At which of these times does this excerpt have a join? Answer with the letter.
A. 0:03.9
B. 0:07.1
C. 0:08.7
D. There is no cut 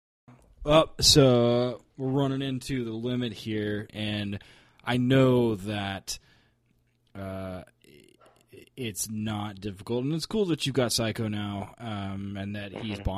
A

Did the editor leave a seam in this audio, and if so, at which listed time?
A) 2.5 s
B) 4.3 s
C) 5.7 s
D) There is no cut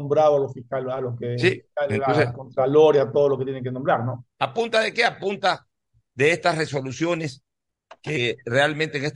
B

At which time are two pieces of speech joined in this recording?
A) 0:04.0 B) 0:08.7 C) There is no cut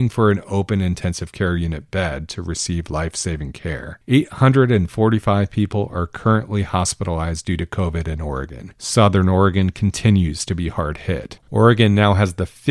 C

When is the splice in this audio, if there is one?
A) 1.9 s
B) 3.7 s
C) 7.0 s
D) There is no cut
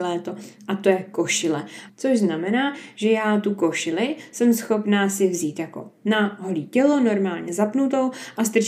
A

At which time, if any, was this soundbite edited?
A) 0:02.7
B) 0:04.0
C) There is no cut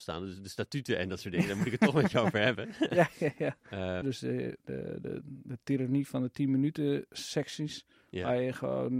B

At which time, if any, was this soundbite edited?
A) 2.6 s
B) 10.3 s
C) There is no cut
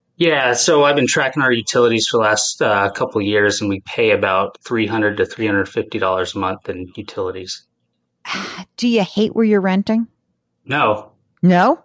C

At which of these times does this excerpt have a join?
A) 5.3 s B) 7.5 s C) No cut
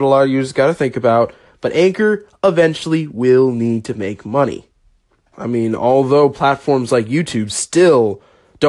A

